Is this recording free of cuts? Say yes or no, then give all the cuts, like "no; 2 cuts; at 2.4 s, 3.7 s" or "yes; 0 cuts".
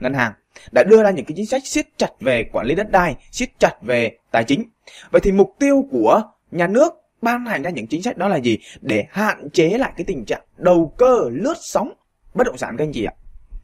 yes; 0 cuts